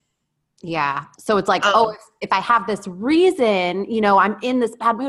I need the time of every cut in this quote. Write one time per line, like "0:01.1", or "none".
0:01.2